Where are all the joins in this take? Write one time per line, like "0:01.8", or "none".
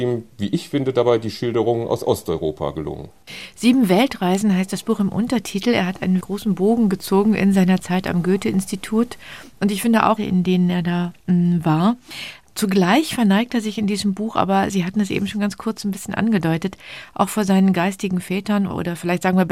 0:06.2
0:10.2